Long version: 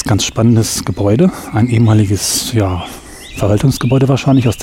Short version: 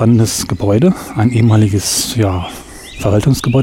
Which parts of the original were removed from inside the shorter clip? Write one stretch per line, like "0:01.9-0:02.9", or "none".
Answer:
none